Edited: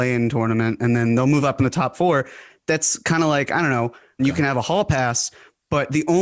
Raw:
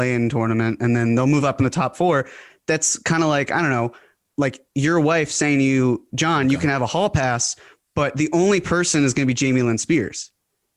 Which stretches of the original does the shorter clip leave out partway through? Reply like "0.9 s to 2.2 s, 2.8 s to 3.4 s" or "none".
4.2 s to 6.4 s